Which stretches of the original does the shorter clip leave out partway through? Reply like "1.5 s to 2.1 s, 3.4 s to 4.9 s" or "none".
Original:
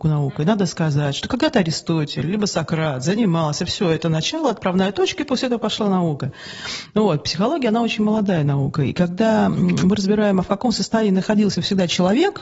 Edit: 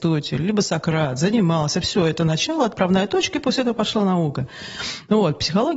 none